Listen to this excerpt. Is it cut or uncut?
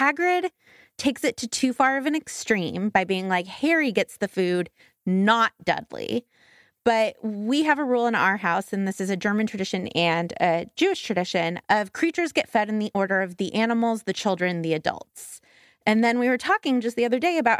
uncut